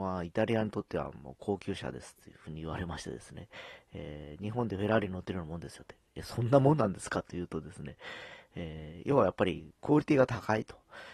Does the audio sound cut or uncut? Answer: cut